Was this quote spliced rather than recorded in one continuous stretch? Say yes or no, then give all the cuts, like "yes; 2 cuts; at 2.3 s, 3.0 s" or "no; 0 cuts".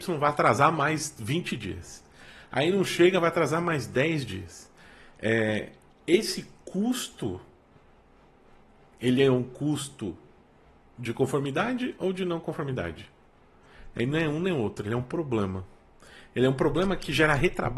no; 0 cuts